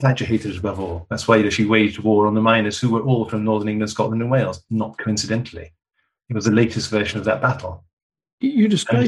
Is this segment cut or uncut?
uncut